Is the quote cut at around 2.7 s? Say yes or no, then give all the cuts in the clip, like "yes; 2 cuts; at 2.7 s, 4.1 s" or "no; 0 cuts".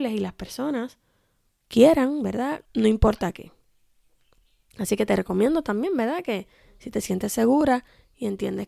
yes; 1 cut; at 2.7 s